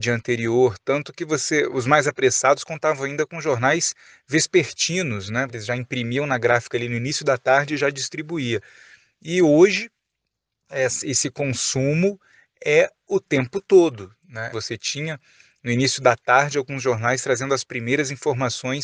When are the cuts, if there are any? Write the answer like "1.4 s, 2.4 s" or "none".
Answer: 5.5 s, 14.5 s